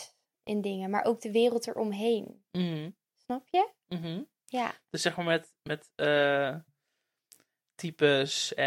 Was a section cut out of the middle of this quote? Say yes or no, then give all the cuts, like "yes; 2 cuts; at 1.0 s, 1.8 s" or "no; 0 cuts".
no; 0 cuts